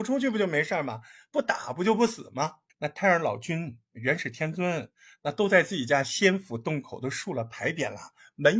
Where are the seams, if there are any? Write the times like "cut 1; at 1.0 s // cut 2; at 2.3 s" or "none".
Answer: cut 1; at 2.7 s